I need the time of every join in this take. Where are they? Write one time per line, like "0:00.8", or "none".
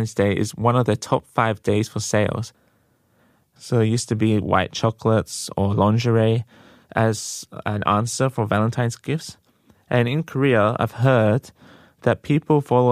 0:03.6